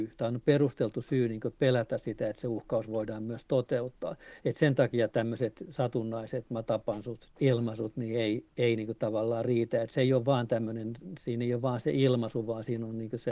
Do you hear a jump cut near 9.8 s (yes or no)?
no